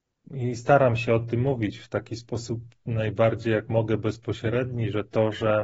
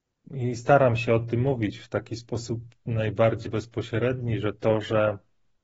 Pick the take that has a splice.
second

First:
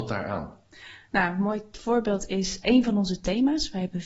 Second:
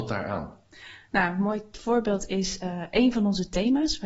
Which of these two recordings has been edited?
first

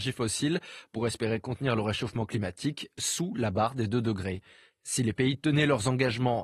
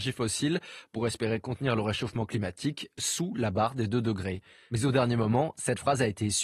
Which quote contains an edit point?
first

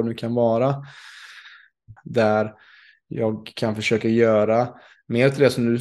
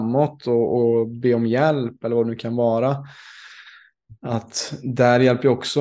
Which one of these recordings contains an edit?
first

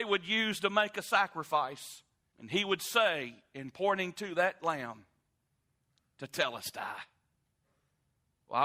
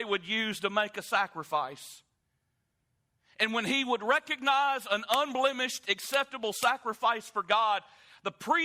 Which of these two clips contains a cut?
first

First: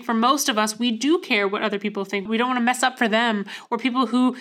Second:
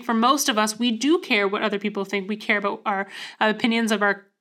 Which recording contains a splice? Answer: first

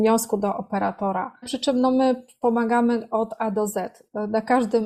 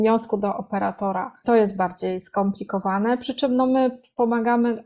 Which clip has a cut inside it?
first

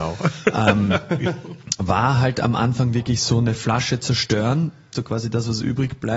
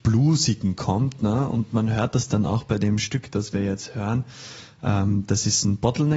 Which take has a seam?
first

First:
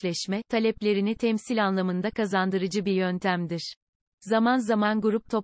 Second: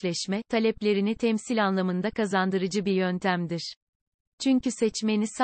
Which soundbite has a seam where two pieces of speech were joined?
first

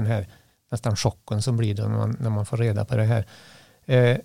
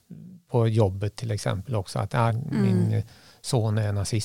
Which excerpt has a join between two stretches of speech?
second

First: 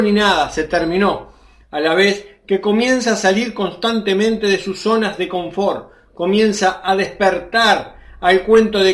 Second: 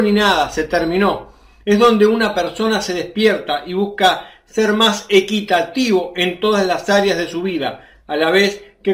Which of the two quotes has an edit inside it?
first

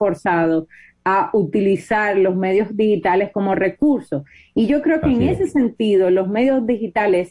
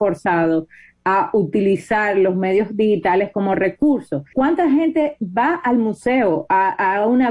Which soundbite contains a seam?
second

